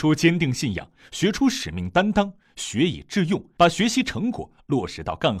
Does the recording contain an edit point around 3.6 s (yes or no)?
yes